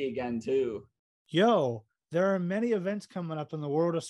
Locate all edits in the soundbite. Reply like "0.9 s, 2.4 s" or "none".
none